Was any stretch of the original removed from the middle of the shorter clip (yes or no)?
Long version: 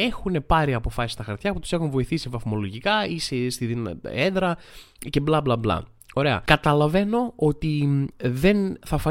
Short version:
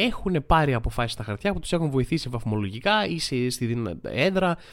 no